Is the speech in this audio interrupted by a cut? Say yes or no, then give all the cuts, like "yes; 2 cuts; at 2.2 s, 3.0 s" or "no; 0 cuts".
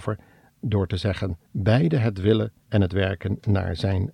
yes; 2 cuts; at 1.5 s, 2.6 s